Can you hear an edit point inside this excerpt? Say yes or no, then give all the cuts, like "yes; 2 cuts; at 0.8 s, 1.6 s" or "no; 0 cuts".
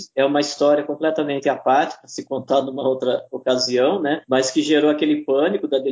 no; 0 cuts